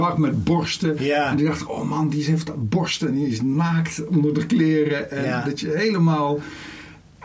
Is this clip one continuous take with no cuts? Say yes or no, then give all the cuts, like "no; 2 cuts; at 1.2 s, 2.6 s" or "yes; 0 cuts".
yes; 0 cuts